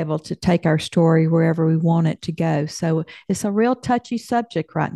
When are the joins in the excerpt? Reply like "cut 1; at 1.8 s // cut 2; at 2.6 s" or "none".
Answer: none